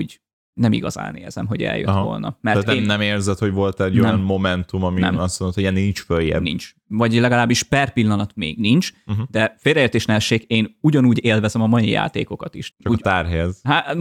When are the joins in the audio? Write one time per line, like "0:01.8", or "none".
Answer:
0:12.7